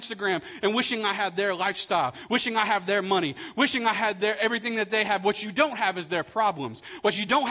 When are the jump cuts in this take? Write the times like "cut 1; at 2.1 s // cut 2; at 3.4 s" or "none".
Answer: none